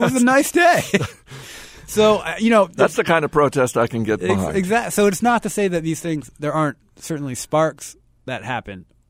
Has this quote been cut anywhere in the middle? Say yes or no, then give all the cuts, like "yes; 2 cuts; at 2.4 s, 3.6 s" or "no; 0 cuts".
no; 0 cuts